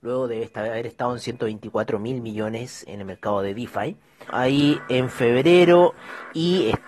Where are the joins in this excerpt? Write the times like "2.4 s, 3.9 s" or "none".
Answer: 2.9 s, 4.3 s